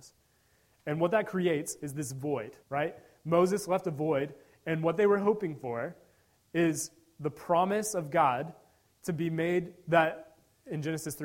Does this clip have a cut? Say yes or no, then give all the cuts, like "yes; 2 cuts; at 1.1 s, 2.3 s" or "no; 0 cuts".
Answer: yes; 1 cut; at 2.6 s